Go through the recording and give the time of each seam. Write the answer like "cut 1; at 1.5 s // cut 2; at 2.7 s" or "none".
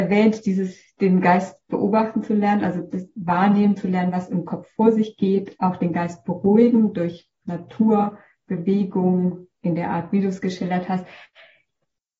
none